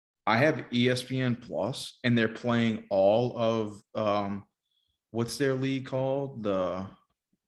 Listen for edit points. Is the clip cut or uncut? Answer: uncut